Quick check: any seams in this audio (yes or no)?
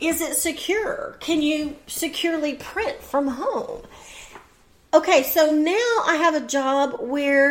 no